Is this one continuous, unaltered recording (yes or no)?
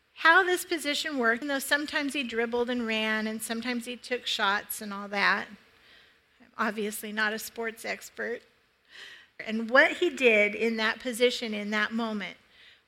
no